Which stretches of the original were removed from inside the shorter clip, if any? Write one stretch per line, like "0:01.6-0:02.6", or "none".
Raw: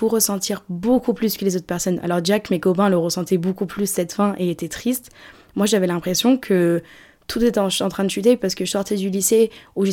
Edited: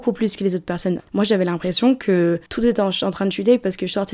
0:02.0-0:05.4
0:06.9-0:07.2